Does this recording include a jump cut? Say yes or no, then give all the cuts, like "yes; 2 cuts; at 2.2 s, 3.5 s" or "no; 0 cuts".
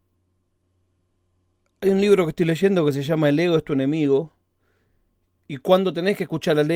yes; 1 cut; at 5.4 s